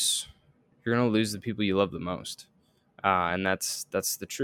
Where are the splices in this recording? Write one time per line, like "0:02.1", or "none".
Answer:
none